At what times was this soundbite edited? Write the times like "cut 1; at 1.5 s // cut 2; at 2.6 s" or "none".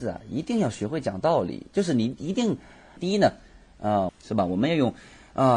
cut 1; at 3.0 s // cut 2; at 4.1 s